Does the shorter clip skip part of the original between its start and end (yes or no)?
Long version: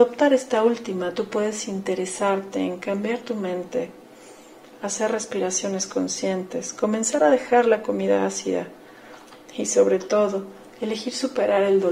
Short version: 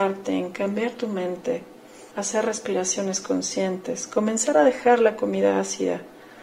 yes